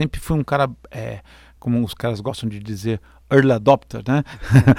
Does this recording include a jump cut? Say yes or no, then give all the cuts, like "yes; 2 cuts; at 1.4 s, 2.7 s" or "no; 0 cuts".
no; 0 cuts